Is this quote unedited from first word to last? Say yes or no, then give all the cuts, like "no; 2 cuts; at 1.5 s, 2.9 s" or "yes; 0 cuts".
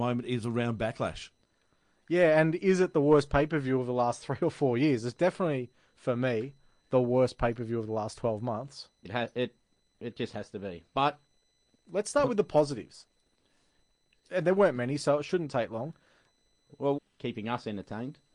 no; 2 cuts; at 9.0 s, 17.0 s